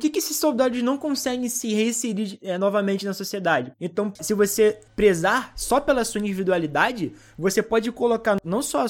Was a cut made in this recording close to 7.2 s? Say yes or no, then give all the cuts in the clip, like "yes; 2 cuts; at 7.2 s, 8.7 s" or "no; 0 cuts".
no; 1 cut; at 3.7 s